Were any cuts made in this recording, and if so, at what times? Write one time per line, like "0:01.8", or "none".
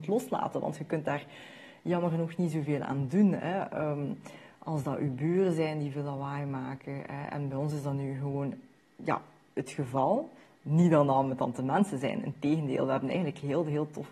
none